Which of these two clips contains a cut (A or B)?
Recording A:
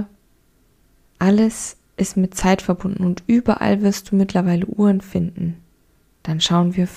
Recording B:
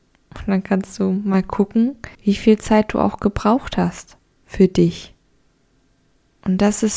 B